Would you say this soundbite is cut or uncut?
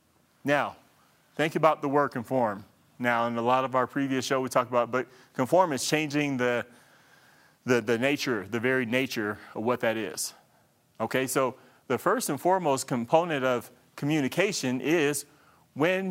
uncut